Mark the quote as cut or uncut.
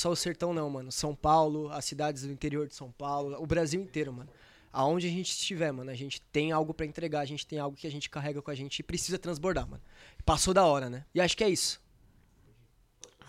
cut